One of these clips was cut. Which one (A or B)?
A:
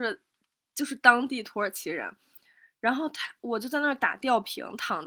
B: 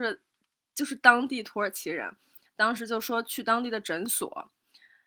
B